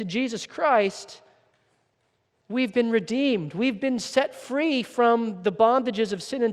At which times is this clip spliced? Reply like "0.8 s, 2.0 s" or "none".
none